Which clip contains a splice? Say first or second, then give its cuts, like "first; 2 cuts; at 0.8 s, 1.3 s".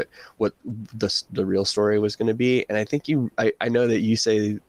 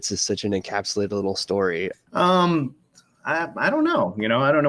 second; 1 cut; at 1.9 s